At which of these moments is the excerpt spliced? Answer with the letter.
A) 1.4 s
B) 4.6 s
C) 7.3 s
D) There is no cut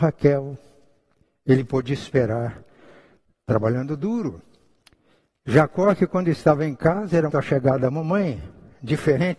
C